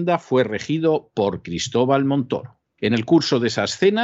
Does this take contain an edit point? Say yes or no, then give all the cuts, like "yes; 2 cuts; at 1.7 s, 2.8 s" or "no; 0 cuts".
yes; 1 cut; at 2.8 s